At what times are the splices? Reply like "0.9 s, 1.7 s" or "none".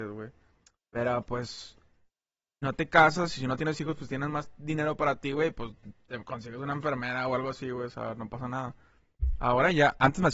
none